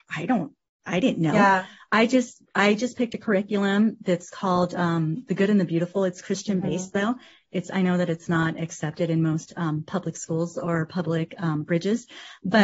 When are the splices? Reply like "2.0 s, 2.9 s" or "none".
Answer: none